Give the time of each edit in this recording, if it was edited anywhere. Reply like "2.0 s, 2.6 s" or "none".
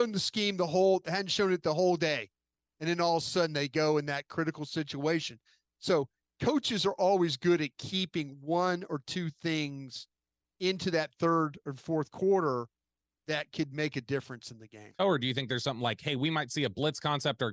15.0 s